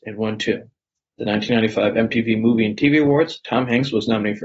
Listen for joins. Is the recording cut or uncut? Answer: cut